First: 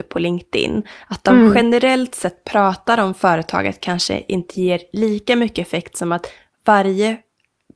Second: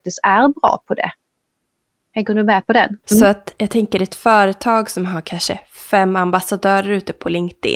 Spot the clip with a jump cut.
second; 1 cut; at 3.0 s

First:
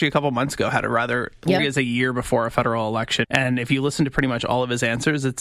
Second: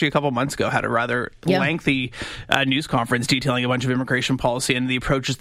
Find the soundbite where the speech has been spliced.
first; 2 cuts; at 1.6 s, 3.2 s

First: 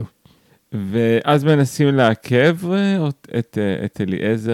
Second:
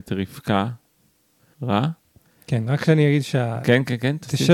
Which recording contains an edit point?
second; 1 cut; at 1.5 s

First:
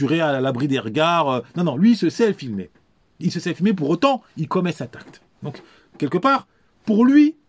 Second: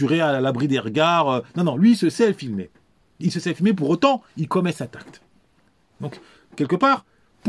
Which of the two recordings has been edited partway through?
first; 1 cut; at 5.3 s

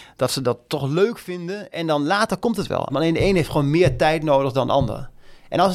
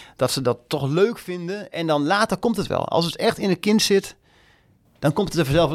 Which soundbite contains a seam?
first; 1 cut; at 2.9 s

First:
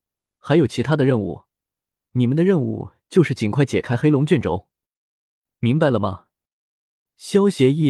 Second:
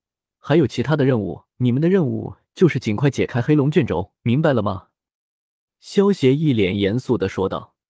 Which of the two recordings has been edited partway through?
second; 2 cuts; at 1.5 s, 4.2 s

